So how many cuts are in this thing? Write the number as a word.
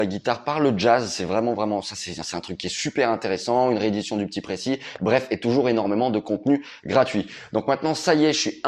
zero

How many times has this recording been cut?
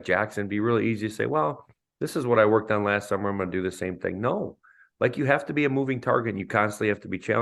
zero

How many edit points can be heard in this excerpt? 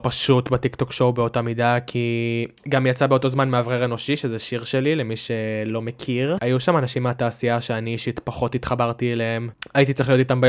two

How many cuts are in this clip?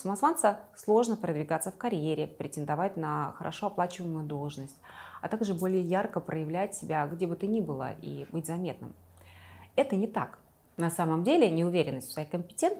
zero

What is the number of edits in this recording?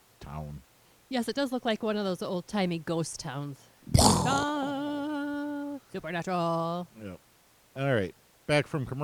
one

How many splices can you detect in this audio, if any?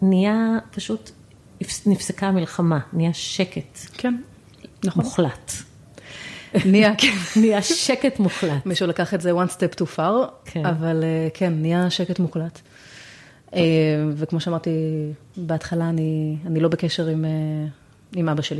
one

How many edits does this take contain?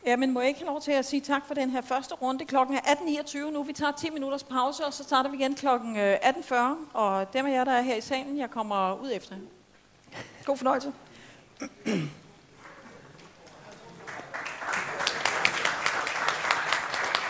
zero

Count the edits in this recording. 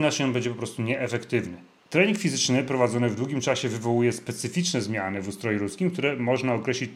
one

